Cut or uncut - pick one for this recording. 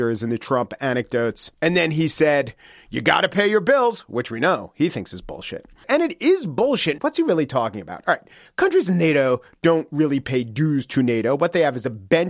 cut